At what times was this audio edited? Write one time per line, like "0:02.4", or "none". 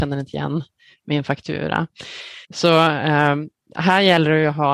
0:02.5